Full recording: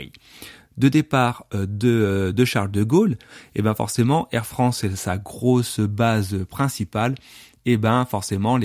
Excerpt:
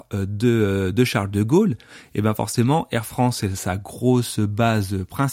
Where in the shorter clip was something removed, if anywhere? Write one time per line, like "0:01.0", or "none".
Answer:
none